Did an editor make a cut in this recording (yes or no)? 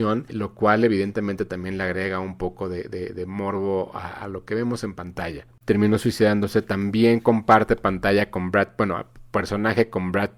yes